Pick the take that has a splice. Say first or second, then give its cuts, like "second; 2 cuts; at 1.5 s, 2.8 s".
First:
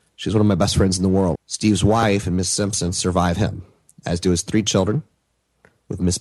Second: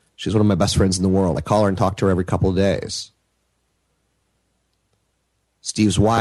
first; 1 cut; at 1.3 s